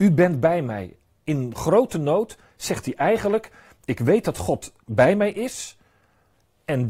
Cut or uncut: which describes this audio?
uncut